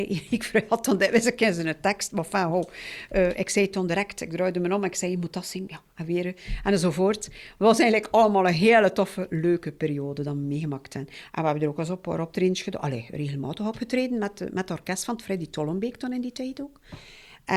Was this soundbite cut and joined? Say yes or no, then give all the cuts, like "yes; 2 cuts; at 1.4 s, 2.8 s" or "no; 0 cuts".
no; 0 cuts